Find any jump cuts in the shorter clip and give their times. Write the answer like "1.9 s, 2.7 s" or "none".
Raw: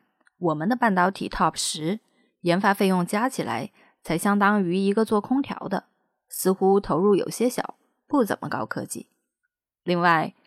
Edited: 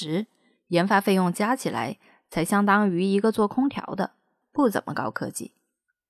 4.4 s